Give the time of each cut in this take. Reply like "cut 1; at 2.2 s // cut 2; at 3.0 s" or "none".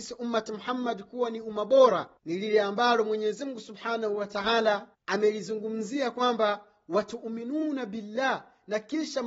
cut 1; at 2.2 s // cut 2; at 4.9 s